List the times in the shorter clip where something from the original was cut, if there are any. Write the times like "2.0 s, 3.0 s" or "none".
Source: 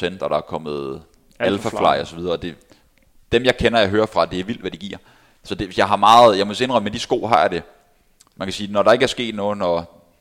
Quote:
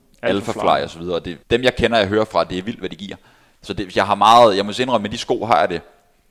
1.4 s